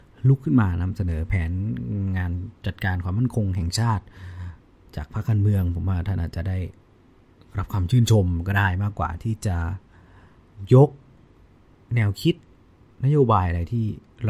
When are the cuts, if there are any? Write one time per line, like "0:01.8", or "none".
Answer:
none